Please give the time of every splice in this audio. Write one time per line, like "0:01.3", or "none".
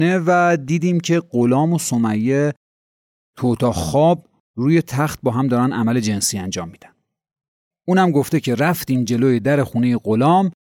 0:07.7